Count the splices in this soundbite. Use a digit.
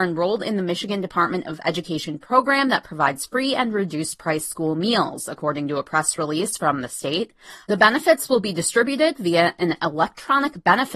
1